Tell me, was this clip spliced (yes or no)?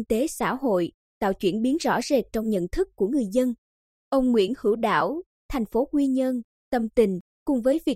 yes